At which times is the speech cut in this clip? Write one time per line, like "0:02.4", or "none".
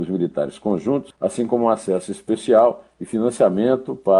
0:01.1